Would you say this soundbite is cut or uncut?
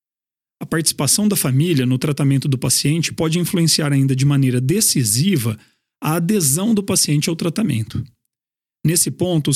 uncut